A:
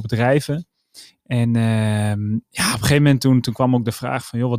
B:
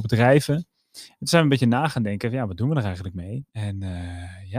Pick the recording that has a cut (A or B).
B